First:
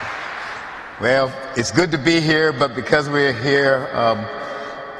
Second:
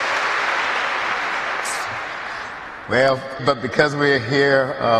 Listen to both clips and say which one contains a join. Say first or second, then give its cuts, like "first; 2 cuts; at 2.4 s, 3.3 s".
second; 1 cut; at 3.4 s